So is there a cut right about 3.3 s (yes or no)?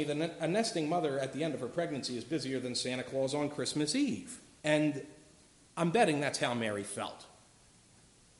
no